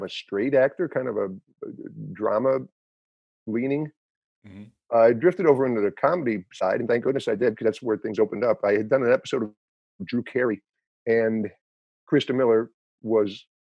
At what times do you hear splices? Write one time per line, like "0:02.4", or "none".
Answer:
none